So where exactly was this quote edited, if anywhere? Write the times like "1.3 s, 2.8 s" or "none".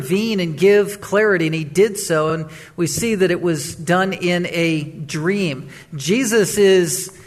none